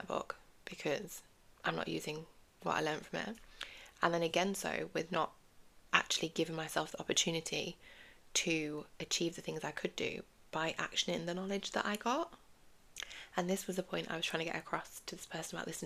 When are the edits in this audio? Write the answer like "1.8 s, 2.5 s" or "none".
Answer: none